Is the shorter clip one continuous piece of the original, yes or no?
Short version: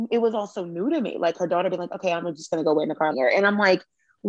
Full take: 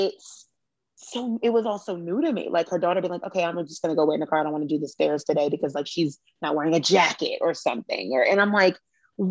no